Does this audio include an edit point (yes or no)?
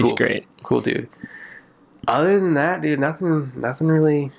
no